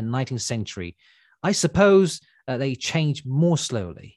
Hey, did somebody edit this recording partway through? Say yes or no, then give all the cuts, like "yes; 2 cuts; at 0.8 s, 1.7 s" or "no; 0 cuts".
no; 0 cuts